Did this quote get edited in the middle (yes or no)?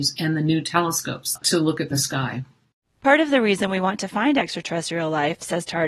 no